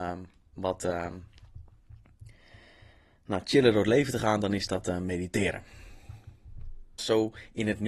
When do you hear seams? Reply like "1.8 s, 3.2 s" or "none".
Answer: 7.0 s